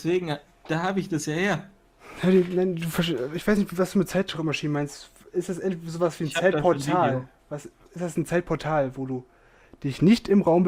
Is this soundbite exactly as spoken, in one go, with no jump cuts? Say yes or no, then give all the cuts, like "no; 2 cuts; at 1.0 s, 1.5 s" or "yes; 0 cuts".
yes; 0 cuts